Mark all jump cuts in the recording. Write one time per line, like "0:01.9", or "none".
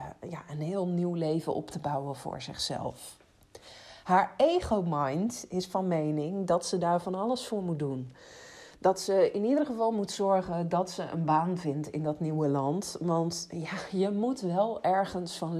none